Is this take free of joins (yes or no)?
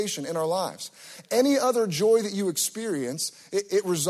yes